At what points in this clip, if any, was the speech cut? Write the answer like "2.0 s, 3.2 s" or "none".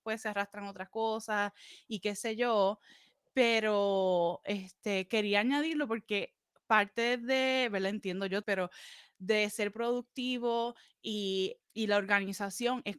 8.4 s, 11.6 s